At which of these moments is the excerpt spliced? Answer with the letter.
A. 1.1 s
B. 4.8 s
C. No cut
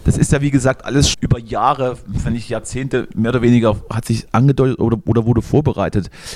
A